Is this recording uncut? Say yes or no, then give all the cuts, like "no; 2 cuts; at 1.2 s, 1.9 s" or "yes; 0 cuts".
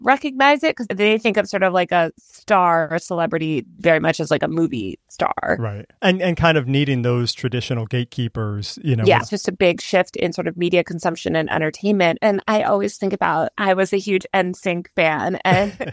no; 3 cuts; at 9.2 s, 12.2 s, 13.5 s